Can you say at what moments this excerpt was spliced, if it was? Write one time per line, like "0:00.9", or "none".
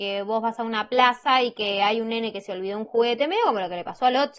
none